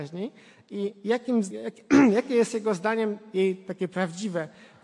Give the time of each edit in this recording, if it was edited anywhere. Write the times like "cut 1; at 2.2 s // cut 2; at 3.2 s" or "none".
cut 1; at 1.5 s